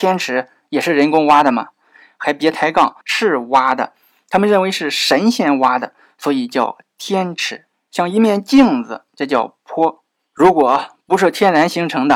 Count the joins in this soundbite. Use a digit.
3